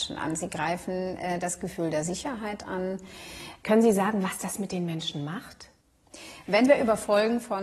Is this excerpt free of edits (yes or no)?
no